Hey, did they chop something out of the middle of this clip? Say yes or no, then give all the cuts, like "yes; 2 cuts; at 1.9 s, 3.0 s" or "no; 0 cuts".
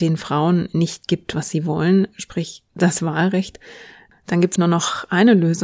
yes; 1 cut; at 4.6 s